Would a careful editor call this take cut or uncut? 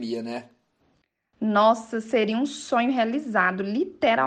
uncut